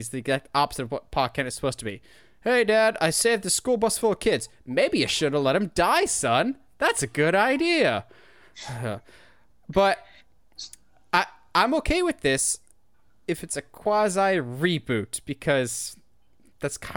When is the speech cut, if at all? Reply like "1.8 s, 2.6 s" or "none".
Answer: none